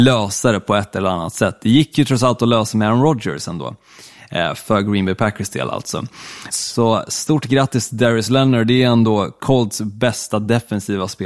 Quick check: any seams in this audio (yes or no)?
yes